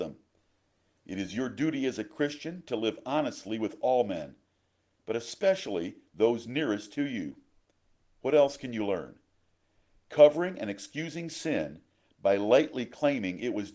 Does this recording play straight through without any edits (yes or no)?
yes